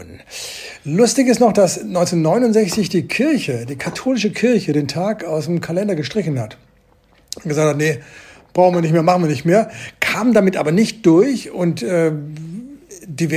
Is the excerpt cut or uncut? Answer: uncut